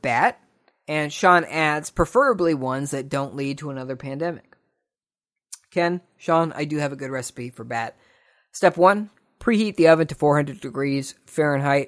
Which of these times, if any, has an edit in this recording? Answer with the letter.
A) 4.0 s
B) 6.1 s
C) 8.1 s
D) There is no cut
D